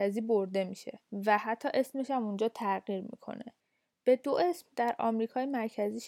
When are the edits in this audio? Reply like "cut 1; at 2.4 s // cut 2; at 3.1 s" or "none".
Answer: cut 1; at 1.0 s

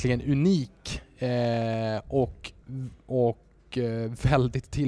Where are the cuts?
none

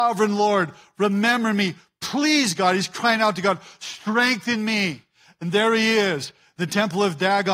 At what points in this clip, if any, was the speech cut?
none

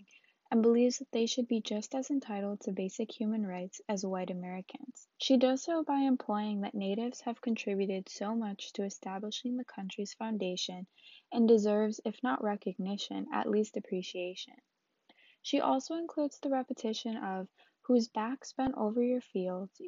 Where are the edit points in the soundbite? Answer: cut 1; at 5.1 s

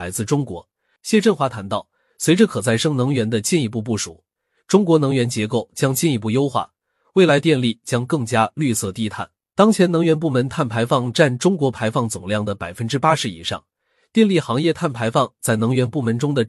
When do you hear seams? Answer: cut 1; at 1.0 s // cut 2; at 9.4 s

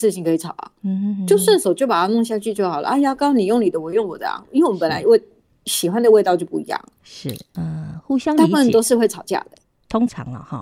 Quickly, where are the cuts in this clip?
cut 1; at 7.5 s

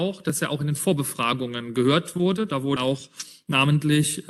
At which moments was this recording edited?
cut 1; at 2.8 s

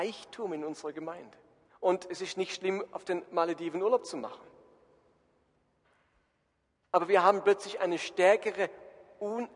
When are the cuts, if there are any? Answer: cut 1; at 1.7 s

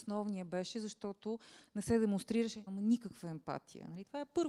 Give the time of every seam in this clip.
cut 1; at 2.7 s

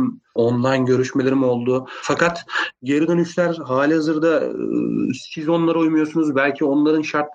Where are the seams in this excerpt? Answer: none

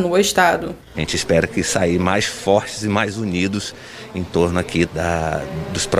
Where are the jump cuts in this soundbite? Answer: cut 1; at 0.9 s // cut 2; at 4.8 s

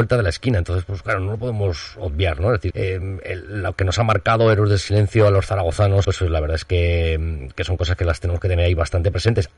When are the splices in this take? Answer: cut 1; at 2.7 s // cut 2; at 6.0 s

